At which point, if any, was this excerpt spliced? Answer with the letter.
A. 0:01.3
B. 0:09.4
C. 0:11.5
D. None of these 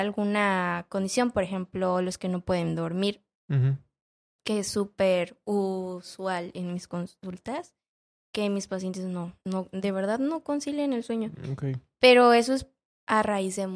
B